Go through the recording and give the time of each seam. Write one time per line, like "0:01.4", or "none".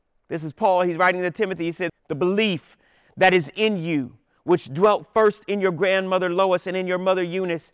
0:01.9